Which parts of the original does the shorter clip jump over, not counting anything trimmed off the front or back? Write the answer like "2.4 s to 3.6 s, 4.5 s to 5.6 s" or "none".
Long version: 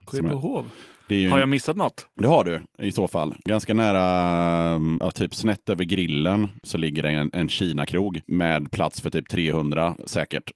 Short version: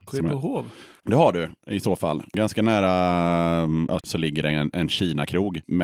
1.0 s to 2.1 s, 5.1 s to 6.6 s